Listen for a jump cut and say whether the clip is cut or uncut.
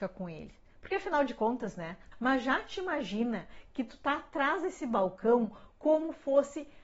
cut